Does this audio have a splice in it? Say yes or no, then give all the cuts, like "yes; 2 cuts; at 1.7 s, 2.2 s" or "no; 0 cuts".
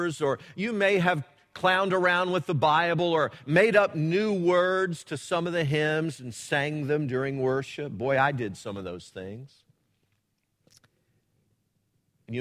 no; 0 cuts